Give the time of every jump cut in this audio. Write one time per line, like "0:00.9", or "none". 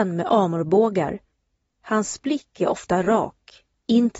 none